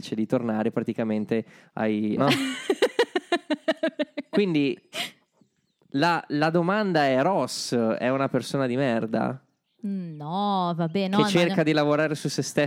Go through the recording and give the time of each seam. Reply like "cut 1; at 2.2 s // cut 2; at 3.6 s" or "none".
cut 1; at 2.2 s